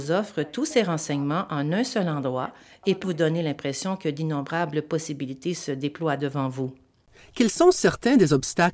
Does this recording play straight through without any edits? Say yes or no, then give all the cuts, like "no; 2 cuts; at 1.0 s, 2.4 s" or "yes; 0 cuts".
no; 1 cut; at 3.0 s